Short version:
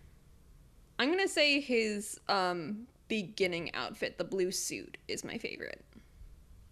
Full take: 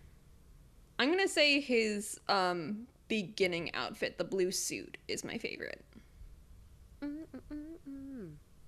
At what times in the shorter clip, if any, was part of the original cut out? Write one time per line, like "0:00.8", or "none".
none